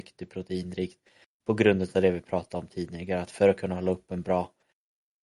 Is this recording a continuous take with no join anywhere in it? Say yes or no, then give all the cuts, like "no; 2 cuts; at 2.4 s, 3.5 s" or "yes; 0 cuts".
yes; 0 cuts